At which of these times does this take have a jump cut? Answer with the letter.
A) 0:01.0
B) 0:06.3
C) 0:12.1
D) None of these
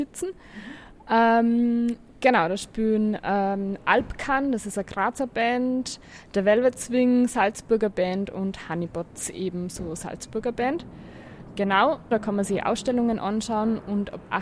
C